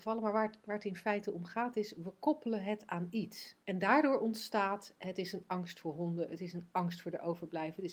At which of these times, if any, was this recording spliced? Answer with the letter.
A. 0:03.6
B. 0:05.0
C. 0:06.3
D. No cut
A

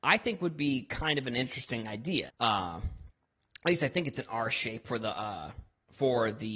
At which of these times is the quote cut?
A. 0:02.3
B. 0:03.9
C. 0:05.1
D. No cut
A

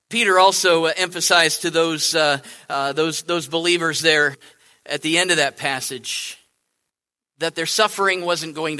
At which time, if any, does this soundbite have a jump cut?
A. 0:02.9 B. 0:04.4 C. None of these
C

